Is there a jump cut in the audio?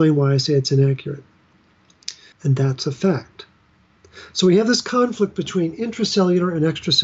yes; 1 cut; at 2.3 s

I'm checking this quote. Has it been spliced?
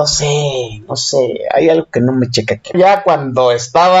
yes; 1 cut; at 2.7 s

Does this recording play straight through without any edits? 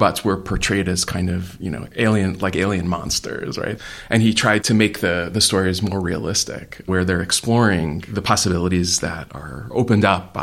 yes; 0 cuts

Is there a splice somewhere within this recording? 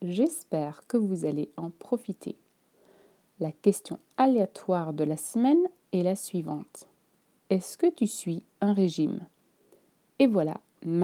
no; 0 cuts

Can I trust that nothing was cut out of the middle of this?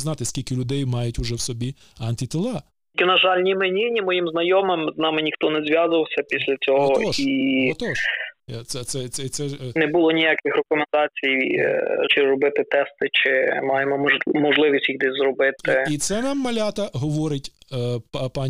no; 1 cut; at 12.1 s

